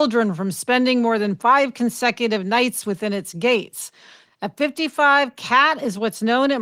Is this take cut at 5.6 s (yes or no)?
no